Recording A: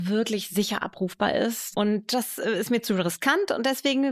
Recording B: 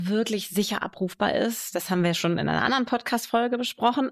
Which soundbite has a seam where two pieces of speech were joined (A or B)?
A